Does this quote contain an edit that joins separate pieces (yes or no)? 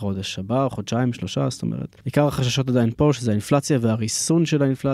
yes